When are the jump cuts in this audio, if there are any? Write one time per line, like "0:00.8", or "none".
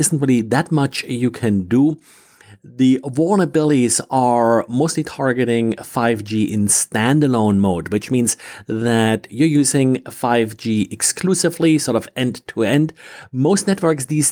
none

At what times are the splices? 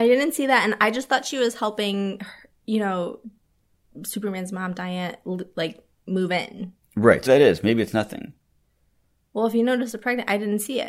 0:07.3

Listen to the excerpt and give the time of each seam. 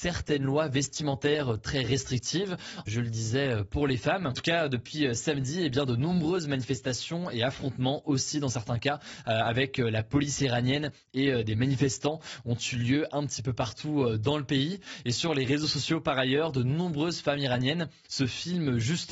0:02.9
0:04.3

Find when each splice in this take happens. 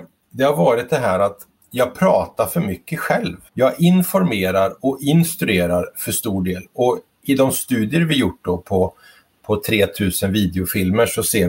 0:03.5

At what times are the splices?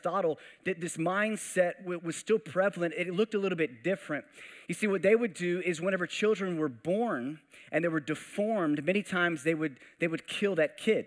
none

